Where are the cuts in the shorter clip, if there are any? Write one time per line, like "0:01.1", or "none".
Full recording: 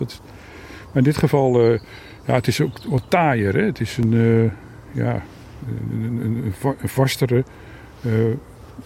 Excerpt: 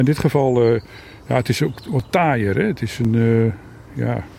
none